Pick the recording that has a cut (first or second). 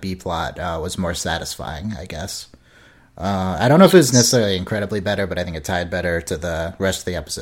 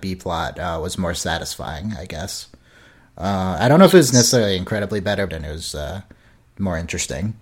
second